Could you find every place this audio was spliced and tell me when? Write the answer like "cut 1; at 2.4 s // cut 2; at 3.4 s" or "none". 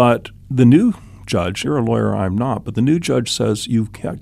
cut 1; at 1.6 s